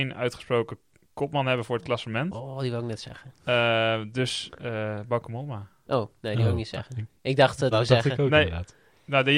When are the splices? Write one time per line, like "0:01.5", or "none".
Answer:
0:07.7